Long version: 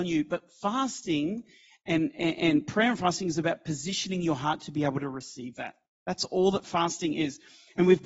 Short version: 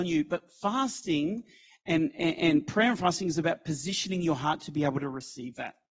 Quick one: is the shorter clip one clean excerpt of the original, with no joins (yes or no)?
yes